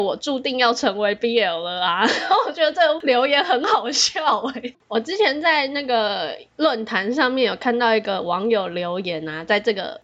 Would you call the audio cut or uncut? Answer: cut